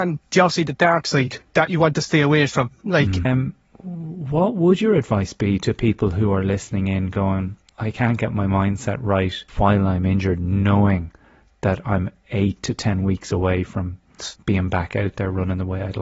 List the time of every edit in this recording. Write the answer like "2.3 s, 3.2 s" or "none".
3.2 s, 7.7 s, 9.5 s